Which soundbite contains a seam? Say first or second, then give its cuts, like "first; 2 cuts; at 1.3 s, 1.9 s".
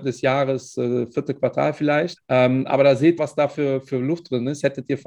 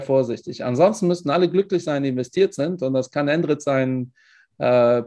first; 2 cuts; at 2.2 s, 3.2 s